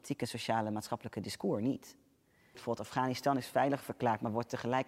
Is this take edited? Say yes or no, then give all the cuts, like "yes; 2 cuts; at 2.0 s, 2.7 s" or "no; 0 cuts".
yes; 1 cut; at 2.5 s